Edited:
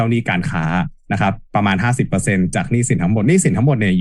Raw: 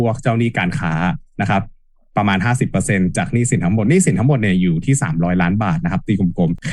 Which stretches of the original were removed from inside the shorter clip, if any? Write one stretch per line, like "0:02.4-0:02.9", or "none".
0:01.7-0:02.1